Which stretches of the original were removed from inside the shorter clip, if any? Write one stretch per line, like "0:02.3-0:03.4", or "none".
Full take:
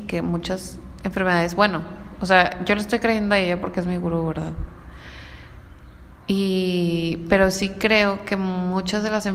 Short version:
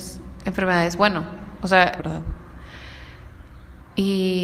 0:02.6-0:04.3